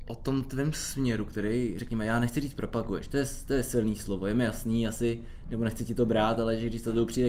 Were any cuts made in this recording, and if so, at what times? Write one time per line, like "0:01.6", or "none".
none